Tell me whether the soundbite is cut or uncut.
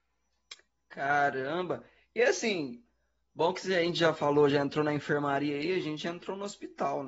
uncut